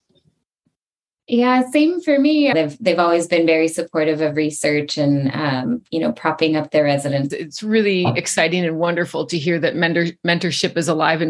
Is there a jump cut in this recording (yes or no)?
yes